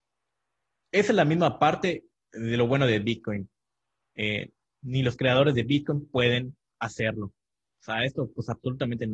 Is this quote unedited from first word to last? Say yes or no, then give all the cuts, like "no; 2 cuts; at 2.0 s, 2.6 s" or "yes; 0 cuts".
no; 1 cut; at 4.6 s